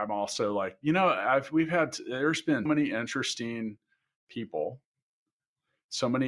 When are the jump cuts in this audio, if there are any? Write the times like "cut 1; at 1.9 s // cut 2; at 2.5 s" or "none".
cut 1; at 2.7 s